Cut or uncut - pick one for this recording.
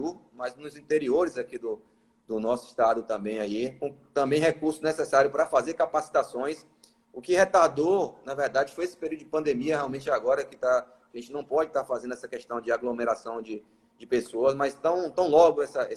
uncut